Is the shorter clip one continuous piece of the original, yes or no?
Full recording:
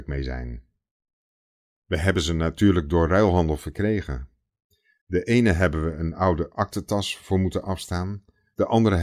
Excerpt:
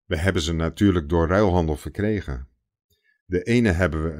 yes